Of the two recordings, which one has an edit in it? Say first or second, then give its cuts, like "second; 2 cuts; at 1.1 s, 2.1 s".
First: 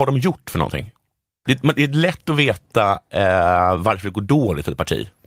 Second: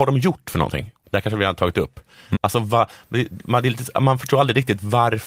second; 2 cuts; at 1.0 s, 2.3 s